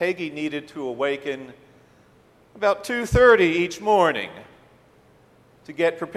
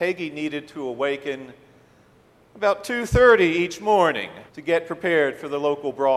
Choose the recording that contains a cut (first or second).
second